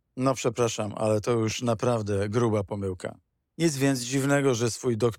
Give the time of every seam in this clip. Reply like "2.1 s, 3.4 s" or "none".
3.4 s